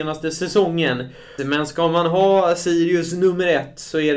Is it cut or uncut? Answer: cut